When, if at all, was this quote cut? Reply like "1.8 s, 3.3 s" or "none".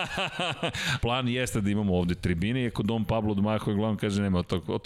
1.0 s